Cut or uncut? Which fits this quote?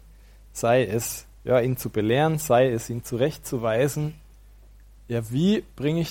uncut